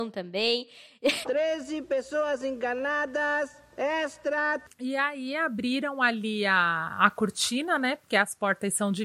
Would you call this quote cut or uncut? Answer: cut